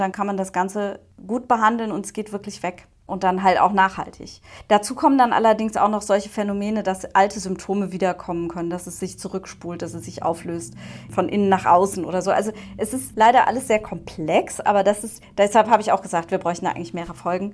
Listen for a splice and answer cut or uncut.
uncut